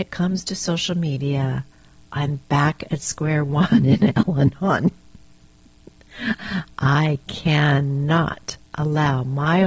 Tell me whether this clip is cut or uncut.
uncut